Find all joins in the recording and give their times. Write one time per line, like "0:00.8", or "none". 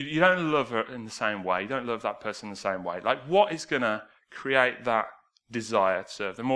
none